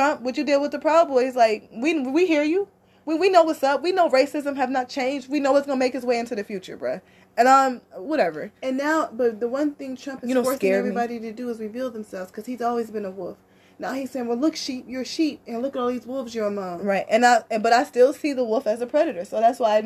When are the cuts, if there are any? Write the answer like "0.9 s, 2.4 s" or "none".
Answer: none